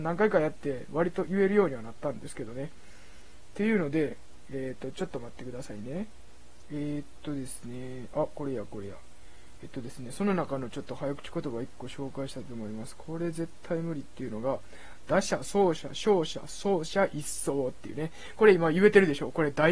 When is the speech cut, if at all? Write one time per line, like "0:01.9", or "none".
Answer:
none